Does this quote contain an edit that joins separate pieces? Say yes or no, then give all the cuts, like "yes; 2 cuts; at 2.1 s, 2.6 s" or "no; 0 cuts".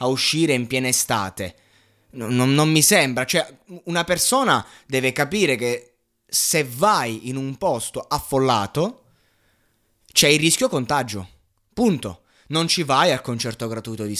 no; 0 cuts